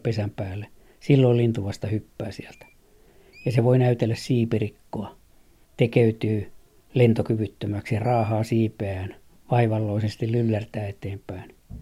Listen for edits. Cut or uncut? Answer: uncut